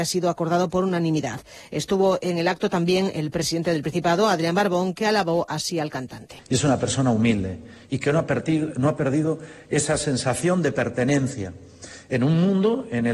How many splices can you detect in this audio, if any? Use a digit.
1